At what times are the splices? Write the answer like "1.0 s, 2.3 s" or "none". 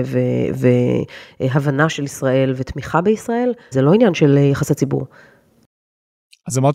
3.7 s

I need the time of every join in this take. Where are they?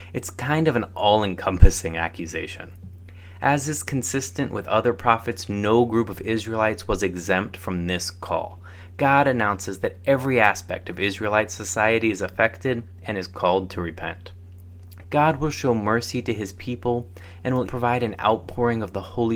15.0 s, 17.7 s

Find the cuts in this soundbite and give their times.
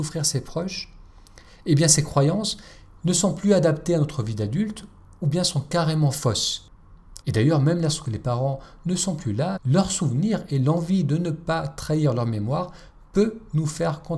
7.2 s, 9.6 s

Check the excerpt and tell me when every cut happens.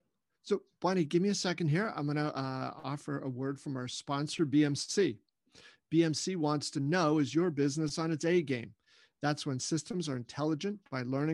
none

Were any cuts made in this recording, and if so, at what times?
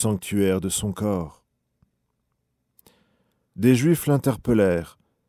3.5 s

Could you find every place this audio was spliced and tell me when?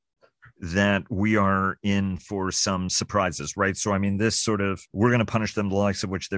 4.9 s

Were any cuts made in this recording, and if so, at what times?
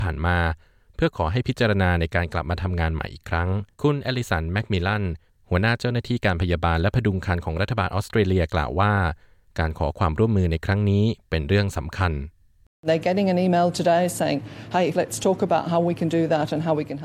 3.7 s, 14.9 s

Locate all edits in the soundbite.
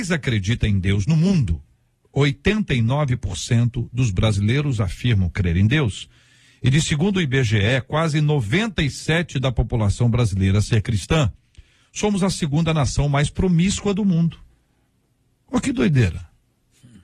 none

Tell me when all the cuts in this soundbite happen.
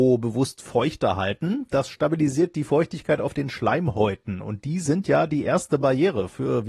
1.7 s

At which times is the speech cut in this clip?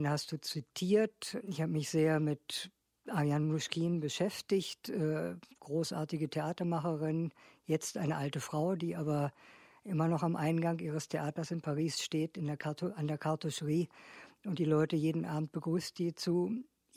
none

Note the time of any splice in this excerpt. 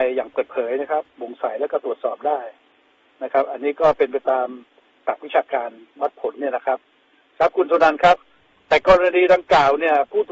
none

